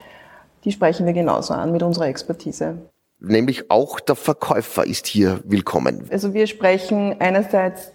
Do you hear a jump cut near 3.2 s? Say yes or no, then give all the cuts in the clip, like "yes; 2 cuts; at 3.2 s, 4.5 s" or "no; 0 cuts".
yes; 2 cuts; at 3.2 s, 6.1 s